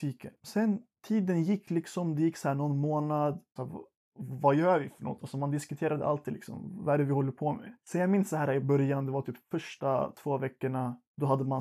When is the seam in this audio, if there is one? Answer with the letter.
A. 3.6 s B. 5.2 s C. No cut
A